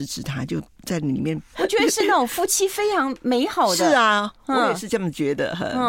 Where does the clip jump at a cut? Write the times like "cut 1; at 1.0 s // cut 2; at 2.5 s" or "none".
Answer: cut 1; at 1.5 s